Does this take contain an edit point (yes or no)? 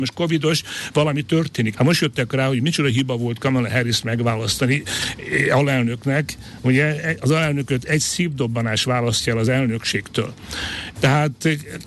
yes